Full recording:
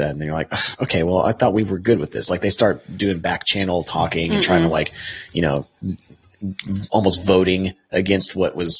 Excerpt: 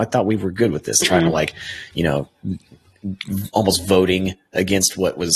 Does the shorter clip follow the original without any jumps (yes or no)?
no